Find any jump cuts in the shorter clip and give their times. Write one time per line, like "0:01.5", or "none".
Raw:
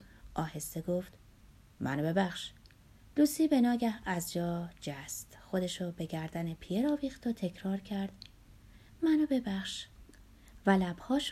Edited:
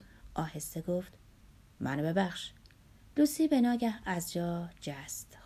none